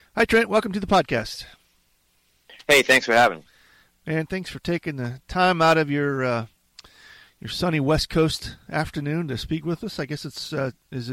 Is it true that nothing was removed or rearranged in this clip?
yes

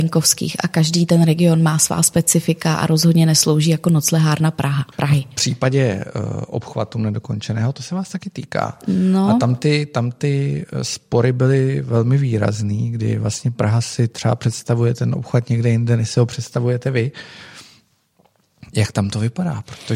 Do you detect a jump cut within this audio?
yes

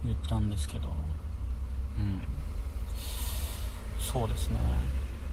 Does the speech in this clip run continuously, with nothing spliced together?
yes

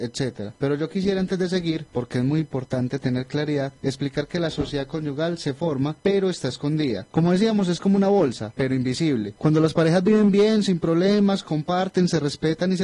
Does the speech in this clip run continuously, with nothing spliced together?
yes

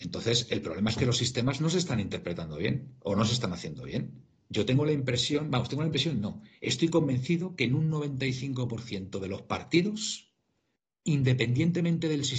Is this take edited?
yes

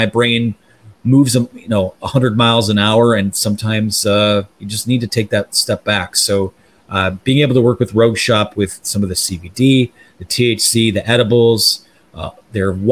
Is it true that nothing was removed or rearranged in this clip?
yes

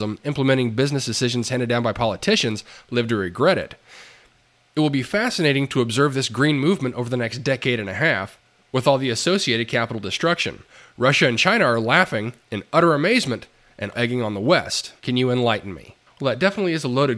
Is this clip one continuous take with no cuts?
no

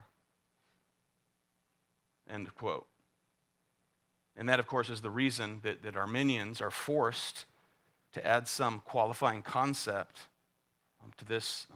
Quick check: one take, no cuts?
yes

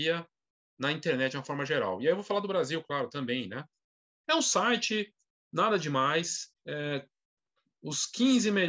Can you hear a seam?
yes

